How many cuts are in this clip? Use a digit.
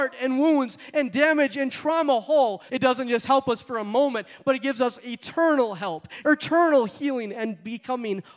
2